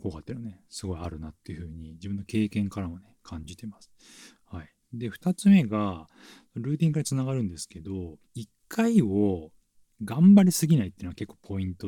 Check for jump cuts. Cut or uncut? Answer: cut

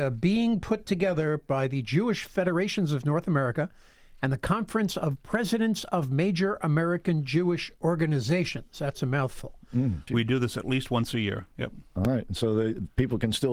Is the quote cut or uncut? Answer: cut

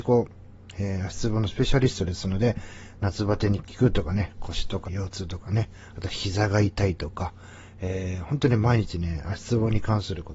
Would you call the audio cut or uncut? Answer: cut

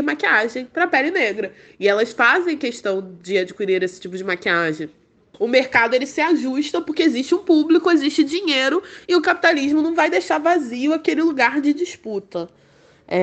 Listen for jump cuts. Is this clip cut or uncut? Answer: cut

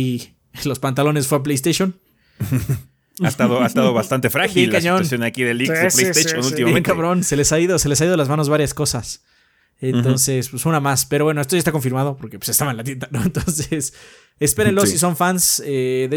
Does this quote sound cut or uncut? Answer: uncut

